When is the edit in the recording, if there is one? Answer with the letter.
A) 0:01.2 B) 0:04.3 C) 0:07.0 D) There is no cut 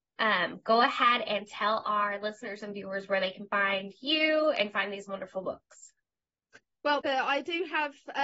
C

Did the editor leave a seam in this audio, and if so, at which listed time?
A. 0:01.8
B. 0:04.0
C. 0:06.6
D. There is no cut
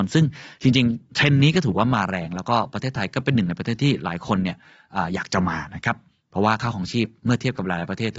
D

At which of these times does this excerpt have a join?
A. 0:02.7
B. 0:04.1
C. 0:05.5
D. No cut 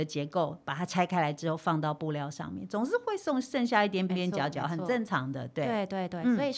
B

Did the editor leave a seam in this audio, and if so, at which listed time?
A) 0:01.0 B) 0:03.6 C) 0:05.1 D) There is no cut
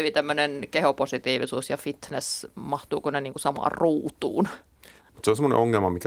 C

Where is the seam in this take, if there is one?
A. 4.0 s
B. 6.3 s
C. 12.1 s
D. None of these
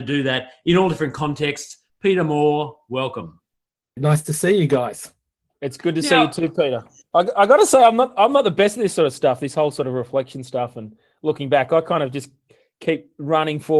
A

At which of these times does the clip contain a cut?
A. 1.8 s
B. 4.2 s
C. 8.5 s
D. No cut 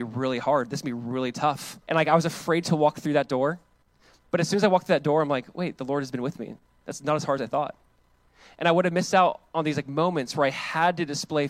A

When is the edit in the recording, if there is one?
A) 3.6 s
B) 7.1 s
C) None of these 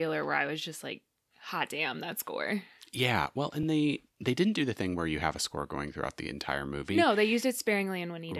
C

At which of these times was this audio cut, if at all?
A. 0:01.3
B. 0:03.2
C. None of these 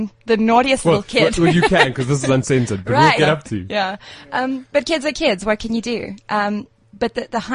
B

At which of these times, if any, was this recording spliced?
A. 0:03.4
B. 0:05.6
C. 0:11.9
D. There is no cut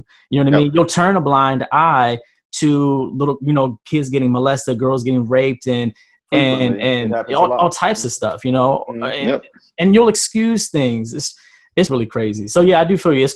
C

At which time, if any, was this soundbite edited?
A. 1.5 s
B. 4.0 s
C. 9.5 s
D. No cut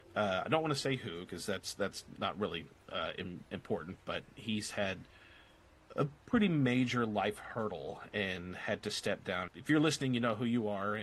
C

